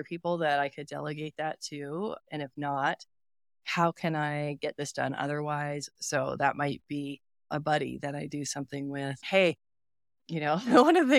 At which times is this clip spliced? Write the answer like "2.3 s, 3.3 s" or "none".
6.0 s, 9.2 s